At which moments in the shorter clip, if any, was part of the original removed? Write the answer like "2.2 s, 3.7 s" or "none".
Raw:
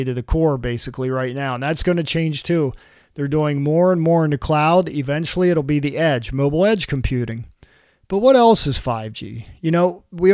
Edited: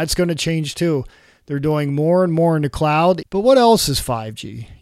3.2 s